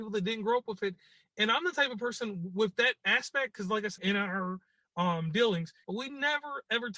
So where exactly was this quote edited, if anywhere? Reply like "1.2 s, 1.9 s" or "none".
4.0 s, 5.8 s